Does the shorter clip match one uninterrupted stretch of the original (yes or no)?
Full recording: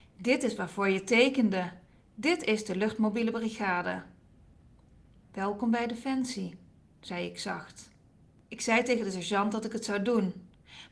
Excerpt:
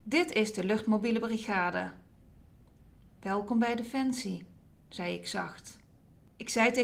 yes